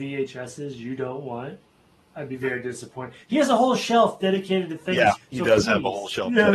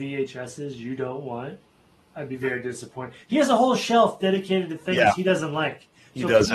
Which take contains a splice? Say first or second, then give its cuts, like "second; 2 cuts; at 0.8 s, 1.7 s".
first; 1 cut; at 5.2 s